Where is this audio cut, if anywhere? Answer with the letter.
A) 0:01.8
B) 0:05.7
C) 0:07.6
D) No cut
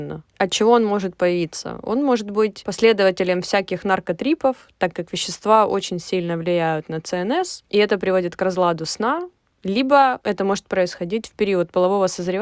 D